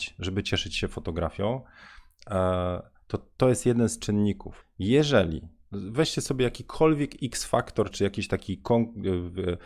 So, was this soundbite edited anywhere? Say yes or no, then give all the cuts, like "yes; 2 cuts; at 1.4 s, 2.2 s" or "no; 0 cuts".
yes; 2 cuts; at 4.6 s, 7.9 s